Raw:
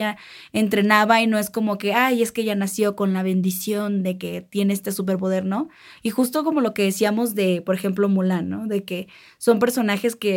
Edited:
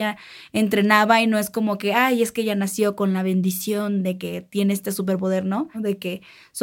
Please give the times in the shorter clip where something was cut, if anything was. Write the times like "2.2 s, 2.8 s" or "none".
5.7 s